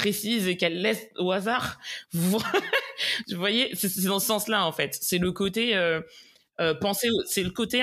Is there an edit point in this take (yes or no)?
no